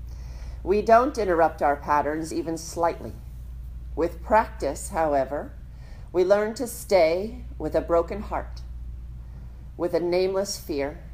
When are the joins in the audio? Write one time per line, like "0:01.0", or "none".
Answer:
none